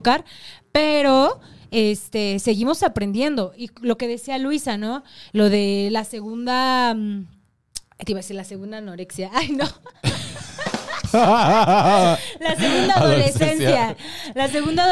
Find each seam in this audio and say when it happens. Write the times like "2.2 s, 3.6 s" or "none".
none